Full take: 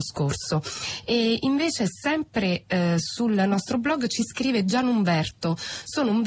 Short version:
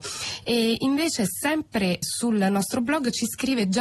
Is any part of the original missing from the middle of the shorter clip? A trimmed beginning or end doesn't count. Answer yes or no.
yes